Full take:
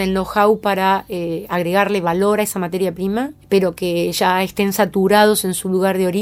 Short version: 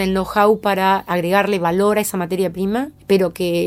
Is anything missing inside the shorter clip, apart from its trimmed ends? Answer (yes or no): yes